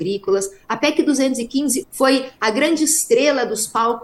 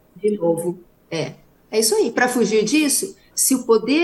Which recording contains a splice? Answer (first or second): first